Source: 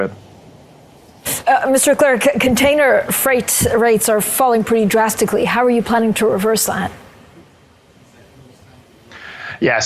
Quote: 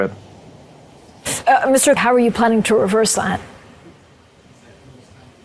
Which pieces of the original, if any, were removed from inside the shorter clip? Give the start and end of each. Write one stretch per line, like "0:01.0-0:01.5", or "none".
0:02.0-0:05.5